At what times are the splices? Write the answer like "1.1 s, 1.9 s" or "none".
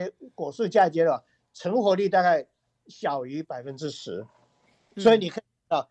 none